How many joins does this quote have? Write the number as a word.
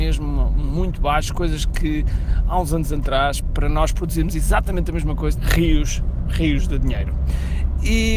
one